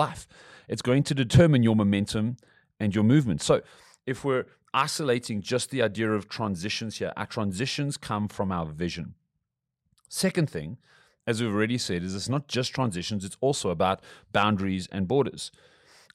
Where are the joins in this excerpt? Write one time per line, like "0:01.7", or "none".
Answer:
none